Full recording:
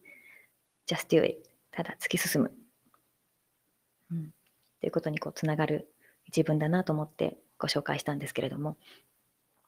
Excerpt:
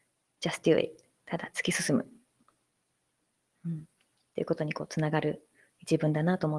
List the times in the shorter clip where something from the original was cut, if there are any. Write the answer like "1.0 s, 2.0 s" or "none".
none

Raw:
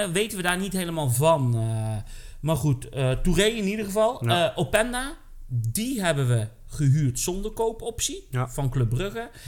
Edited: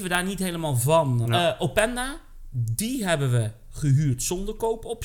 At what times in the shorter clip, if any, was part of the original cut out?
1.2 s

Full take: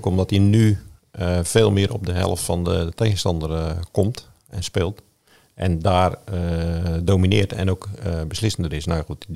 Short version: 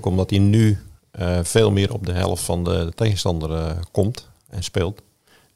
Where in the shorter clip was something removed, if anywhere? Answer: none

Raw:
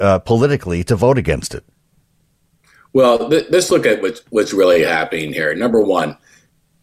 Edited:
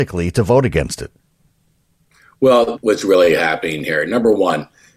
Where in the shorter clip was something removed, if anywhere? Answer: 2.7 s

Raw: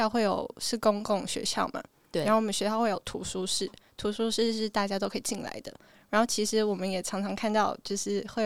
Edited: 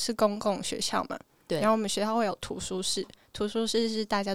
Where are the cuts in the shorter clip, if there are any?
none

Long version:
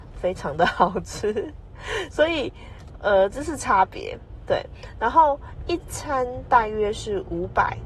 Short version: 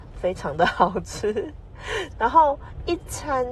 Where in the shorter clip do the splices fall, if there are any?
2.1 s

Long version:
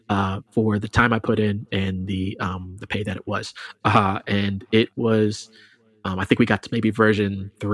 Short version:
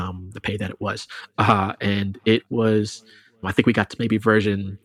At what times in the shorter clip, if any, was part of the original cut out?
3.4 s

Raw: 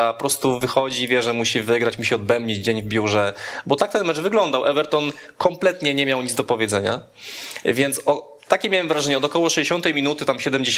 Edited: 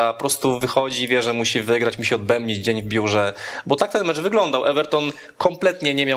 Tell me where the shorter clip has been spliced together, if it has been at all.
none

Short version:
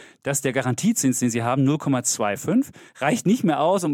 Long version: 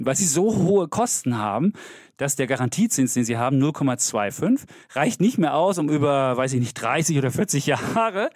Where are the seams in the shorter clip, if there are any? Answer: none

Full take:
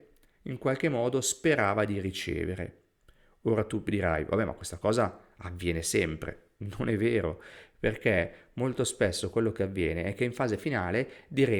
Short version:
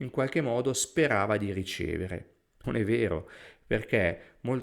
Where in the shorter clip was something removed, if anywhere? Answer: 2.6 s

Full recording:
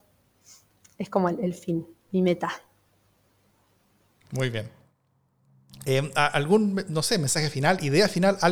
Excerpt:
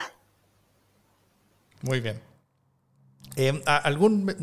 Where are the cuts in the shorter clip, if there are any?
none

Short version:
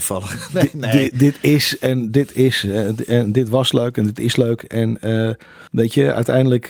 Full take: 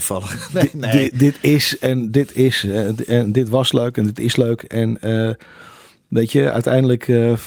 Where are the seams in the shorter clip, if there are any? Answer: 5.7 s

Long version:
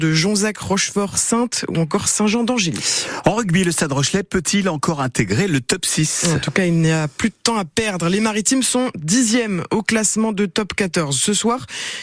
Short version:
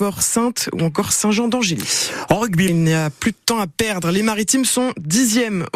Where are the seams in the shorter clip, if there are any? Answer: 2.7 s

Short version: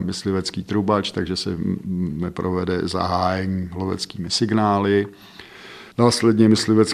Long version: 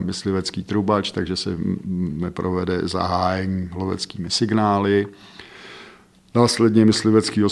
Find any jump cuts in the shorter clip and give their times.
5.9 s

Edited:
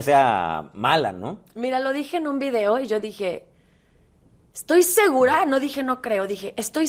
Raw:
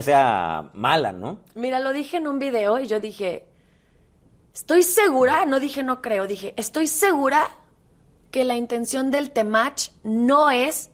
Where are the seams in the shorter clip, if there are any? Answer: none

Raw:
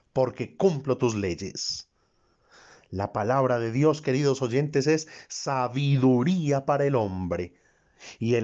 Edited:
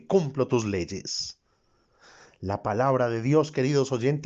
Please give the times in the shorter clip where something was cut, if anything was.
none

